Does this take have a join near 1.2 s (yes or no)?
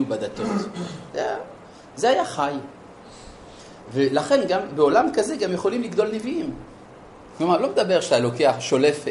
no